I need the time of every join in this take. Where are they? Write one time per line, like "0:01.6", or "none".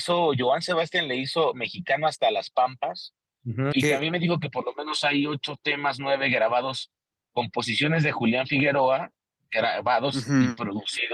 0:03.7